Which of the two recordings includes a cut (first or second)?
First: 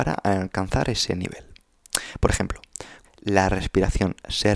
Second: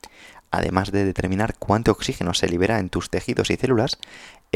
first